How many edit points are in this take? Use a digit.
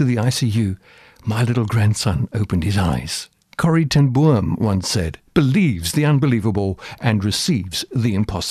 2